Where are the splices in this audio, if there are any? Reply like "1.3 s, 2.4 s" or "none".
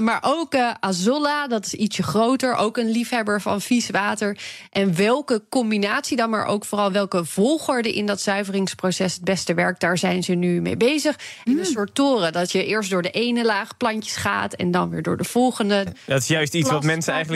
11.4 s, 15.9 s